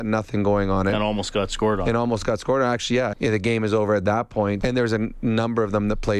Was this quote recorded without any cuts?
no; 2 cuts; at 3.1 s, 4.6 s

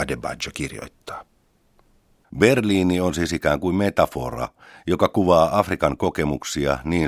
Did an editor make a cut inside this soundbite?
no; 0 cuts

